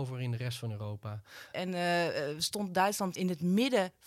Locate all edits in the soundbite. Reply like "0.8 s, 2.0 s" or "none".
1.5 s, 3.1 s